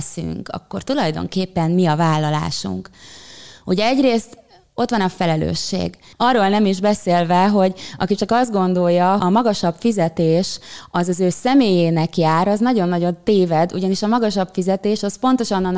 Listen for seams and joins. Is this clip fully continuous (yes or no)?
no